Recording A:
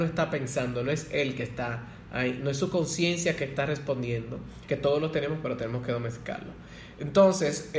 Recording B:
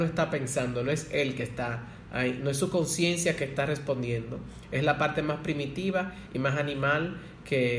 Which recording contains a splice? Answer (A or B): A